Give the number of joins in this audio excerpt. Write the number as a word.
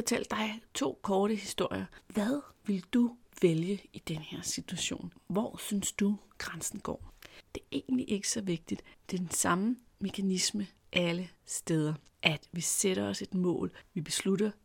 two